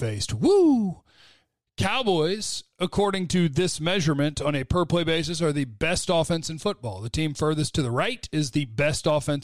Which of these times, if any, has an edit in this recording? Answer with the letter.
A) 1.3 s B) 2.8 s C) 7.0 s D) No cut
D